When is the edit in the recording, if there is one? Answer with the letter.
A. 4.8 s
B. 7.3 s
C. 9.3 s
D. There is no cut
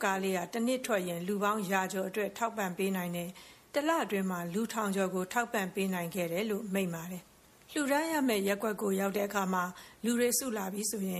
B